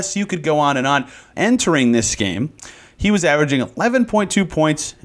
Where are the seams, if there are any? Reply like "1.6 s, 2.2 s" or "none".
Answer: 1.3 s

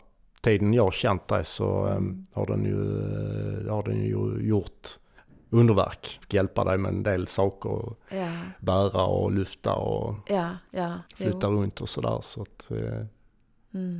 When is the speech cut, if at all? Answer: 6.2 s, 11.1 s

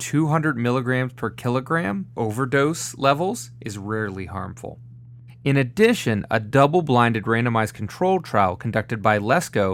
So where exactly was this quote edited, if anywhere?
2.1 s, 5.3 s

